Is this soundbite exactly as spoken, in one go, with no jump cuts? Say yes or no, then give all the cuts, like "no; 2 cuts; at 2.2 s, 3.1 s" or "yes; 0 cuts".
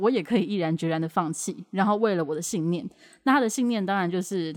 yes; 0 cuts